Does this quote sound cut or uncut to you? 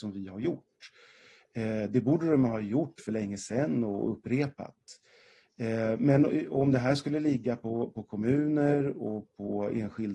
uncut